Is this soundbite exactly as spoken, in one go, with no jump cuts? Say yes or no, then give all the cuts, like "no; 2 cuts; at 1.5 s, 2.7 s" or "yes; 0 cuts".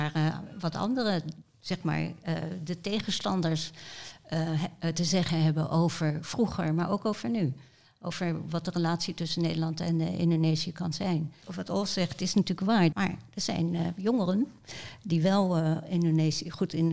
no; 1 cut; at 12.9 s